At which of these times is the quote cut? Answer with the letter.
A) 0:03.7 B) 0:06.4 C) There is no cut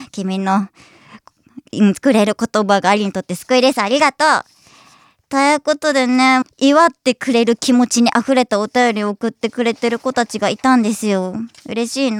B